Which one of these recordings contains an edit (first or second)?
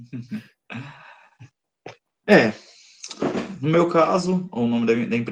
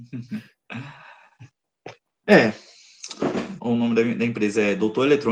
second